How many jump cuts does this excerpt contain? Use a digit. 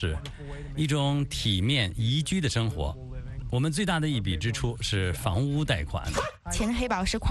1